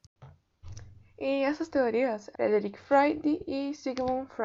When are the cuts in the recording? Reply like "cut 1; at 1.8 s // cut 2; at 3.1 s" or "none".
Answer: cut 1; at 2.3 s